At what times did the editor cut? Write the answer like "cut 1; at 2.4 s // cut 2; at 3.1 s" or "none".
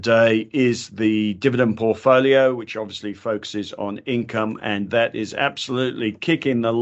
none